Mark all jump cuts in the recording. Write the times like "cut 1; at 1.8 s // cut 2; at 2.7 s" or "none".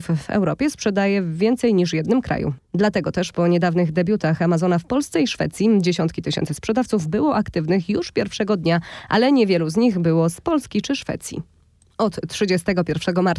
none